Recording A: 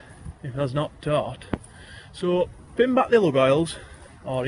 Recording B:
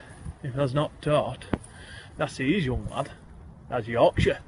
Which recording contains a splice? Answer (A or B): B